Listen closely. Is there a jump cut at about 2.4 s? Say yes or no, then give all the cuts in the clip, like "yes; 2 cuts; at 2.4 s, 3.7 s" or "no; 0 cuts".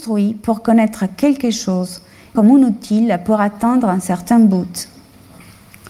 yes; 1 cut; at 2.4 s